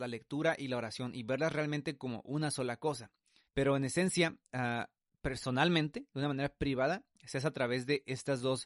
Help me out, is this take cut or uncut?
cut